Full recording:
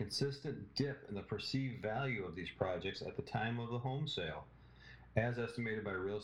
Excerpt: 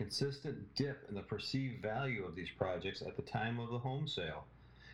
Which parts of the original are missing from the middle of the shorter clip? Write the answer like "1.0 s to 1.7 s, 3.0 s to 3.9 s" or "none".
none